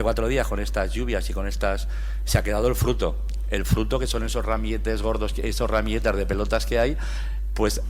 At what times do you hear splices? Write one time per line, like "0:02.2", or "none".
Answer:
0:02.2